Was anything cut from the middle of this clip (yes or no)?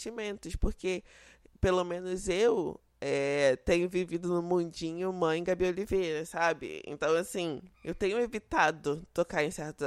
no